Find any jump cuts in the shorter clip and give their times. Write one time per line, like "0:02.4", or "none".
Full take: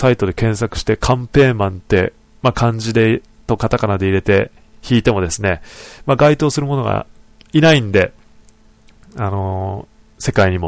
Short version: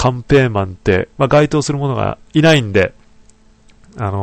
0:01.2
0:02.3